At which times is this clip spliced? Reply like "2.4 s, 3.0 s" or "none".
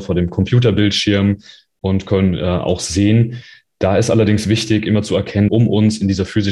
5.5 s